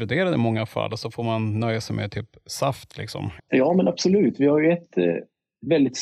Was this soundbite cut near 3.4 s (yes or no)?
yes